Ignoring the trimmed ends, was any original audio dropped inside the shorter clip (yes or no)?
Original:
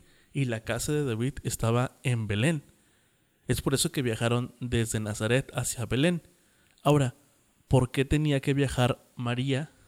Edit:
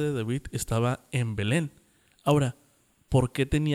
yes